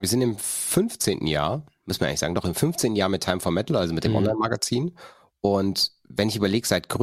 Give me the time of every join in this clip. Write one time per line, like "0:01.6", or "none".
none